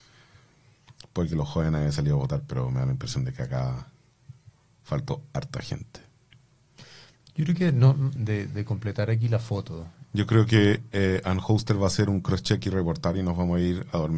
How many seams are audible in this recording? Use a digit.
2